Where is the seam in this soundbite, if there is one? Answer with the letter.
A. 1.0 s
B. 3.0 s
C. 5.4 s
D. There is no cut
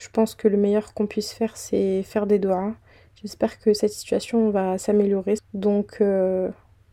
C